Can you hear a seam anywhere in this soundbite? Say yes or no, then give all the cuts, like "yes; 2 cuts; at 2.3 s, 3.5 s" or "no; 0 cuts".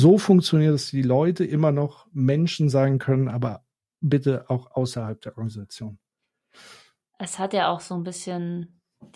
no; 0 cuts